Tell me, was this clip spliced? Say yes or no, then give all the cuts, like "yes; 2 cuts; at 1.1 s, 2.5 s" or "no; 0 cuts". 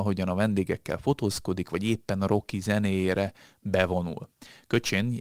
no; 0 cuts